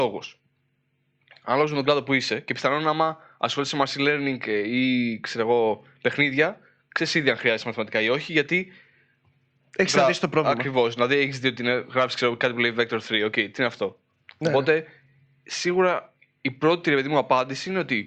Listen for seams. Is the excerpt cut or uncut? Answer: cut